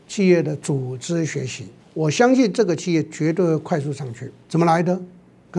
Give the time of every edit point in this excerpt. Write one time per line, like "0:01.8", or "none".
0:01.8
0:04.4